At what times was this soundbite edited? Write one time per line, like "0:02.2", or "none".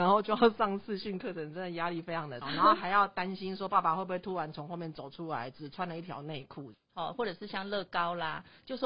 0:02.4
0:06.7